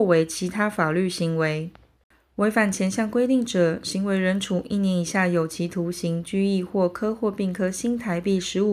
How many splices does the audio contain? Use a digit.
0